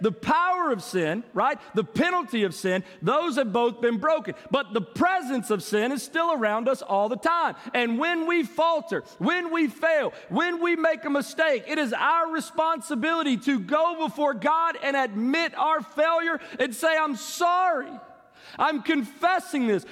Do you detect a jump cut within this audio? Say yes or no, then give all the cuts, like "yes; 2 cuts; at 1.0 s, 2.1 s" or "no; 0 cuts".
no; 0 cuts